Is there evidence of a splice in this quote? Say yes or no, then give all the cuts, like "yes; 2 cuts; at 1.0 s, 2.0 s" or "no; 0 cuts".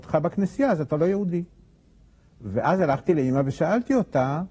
no; 0 cuts